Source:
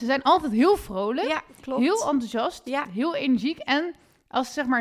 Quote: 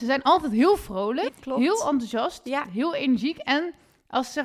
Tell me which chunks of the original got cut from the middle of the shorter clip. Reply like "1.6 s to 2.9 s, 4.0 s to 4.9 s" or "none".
1.3 s to 1.5 s